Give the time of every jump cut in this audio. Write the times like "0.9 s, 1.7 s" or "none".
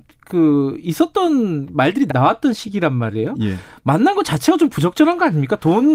2.1 s